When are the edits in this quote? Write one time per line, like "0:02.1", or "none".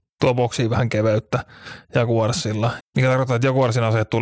0:02.8